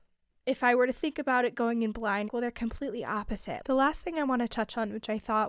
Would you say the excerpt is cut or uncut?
cut